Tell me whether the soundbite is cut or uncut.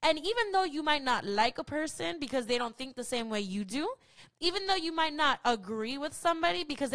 uncut